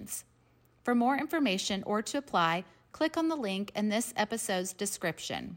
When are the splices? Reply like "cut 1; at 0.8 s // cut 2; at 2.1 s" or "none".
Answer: none

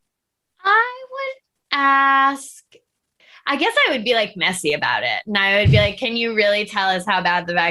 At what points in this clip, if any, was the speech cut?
none

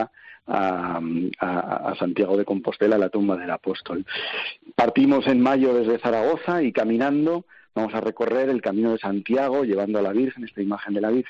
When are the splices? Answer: none

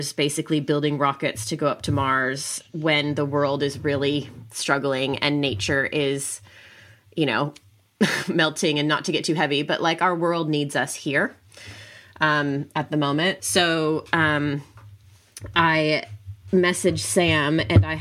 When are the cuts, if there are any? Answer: cut 1; at 13.4 s

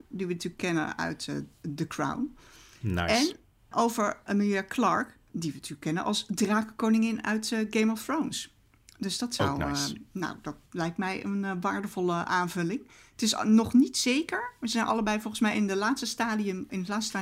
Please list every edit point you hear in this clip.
none

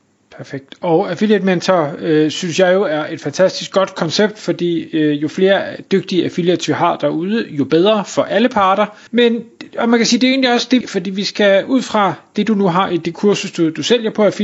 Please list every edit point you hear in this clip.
cut 1; at 9.1 s // cut 2; at 10.8 s

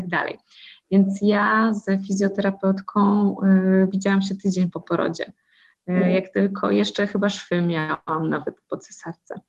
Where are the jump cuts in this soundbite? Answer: none

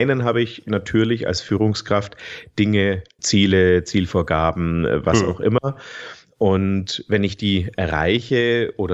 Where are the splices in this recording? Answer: cut 1; at 3.2 s

